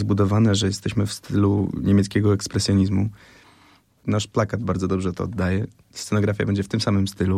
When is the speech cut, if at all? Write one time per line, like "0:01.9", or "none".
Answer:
0:04.0